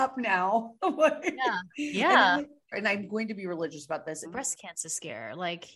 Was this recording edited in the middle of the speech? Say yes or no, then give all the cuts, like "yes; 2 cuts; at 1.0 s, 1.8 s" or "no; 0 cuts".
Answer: yes; 2 cuts; at 2.7 s, 4.2 s